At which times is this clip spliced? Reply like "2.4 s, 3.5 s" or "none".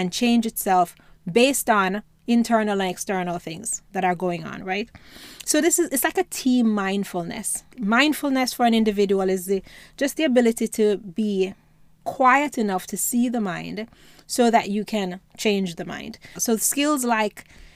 7.7 s, 16.4 s